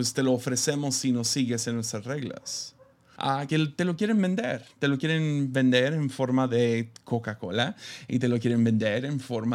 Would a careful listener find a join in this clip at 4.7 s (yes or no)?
no